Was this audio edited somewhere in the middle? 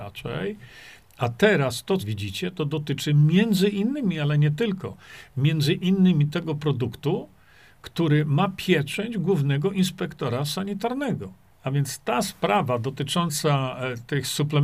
yes; 2 cuts; at 2.0 s, 11.5 s

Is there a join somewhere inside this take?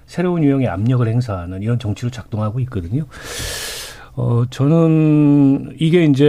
no; 0 cuts

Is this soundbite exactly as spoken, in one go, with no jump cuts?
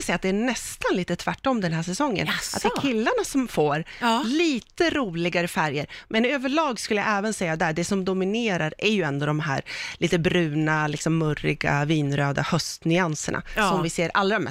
yes; 0 cuts

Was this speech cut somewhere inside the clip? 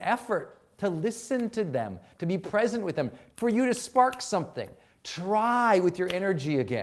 yes; 3 cuts; at 2.1 s, 3.3 s, 4.9 s

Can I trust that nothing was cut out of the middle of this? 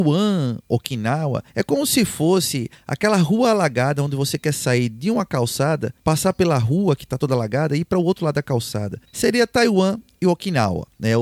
no; 1 cut; at 9.0 s

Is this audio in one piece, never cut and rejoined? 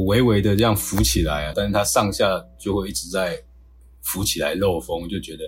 no; 1 cut; at 1.5 s

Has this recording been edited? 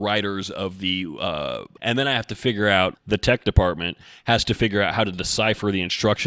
yes; 2 cuts; at 1.8 s, 2.9 s

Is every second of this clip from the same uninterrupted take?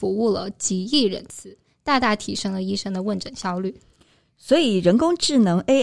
yes; 0 cuts

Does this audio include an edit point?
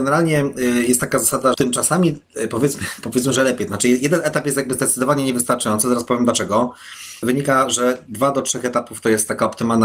yes; 2 cuts; at 1.5 s, 7.2 s

